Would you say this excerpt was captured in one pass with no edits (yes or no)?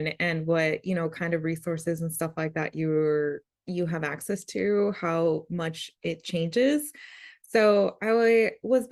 yes